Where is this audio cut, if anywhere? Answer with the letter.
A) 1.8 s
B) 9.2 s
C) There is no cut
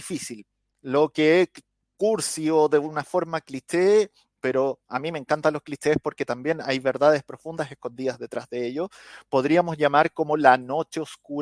A